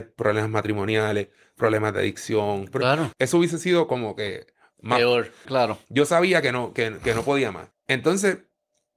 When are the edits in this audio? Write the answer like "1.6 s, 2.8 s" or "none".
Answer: 3.1 s, 5.5 s, 7.7 s